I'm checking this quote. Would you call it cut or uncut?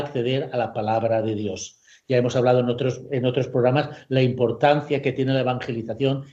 uncut